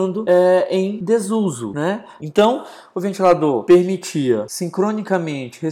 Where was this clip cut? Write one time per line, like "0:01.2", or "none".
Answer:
0:02.2